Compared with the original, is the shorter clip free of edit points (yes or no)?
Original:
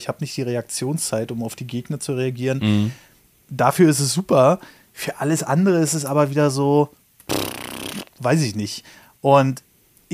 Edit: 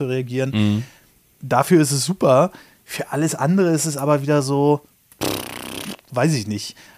yes